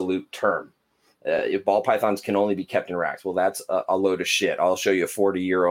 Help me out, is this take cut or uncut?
uncut